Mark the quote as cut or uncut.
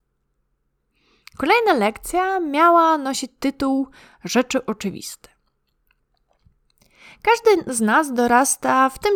uncut